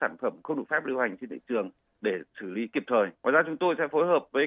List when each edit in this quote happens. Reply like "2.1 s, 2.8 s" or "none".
3.2 s